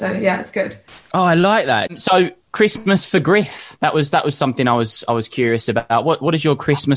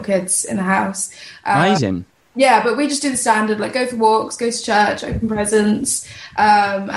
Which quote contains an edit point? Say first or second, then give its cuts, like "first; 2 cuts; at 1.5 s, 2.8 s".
first; 1 cut; at 1.9 s